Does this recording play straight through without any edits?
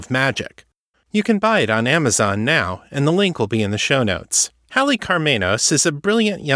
no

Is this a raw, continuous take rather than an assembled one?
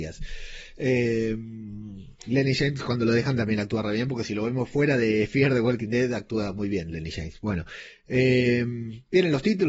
yes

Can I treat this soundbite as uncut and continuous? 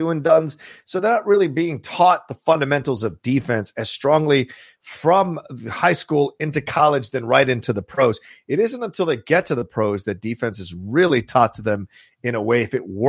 yes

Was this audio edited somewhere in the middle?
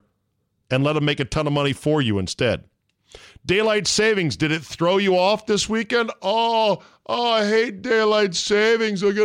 no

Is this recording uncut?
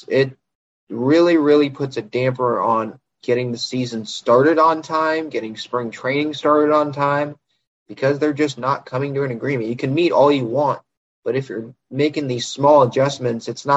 yes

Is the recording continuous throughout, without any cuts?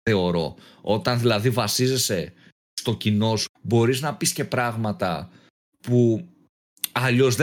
no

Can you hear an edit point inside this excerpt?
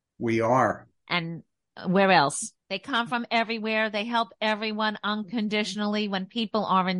yes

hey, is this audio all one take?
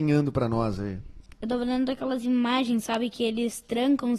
yes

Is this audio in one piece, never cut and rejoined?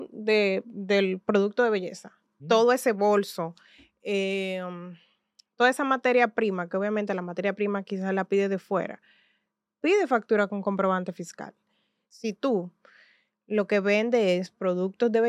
no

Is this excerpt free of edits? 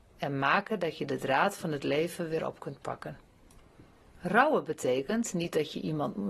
yes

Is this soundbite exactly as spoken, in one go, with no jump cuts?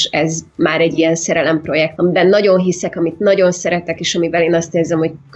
no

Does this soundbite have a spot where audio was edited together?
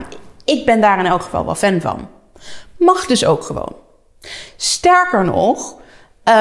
no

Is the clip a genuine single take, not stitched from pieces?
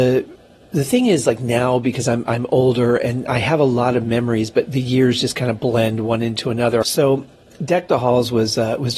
no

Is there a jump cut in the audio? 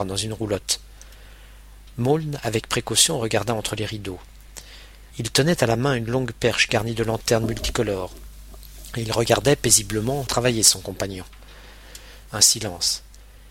yes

